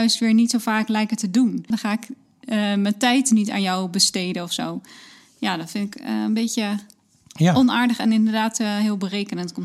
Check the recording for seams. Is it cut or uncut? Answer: cut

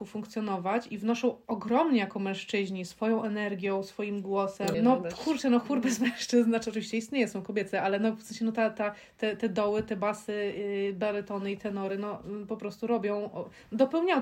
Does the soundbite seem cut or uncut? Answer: cut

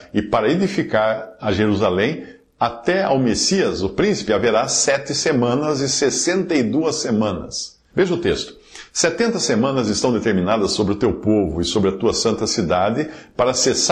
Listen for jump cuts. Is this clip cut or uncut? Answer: cut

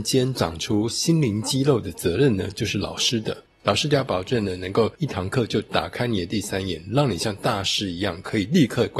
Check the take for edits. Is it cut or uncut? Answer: uncut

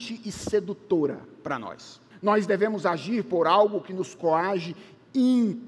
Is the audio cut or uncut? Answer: cut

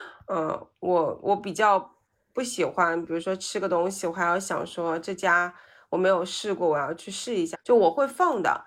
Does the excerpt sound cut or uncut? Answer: cut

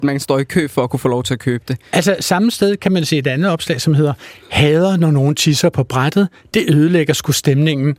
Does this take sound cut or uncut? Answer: uncut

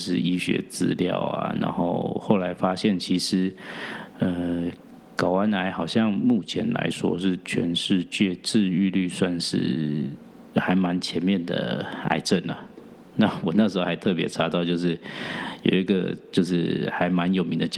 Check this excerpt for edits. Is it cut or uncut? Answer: uncut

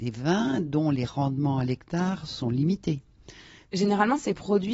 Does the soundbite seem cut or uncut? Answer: cut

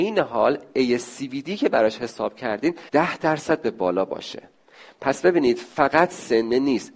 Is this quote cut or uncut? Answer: cut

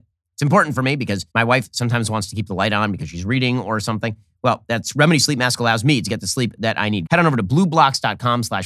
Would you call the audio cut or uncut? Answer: cut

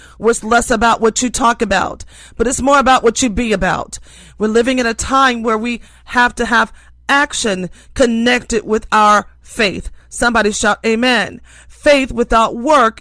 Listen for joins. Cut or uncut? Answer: uncut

